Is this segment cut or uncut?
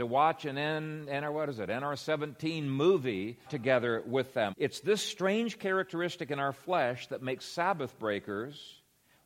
cut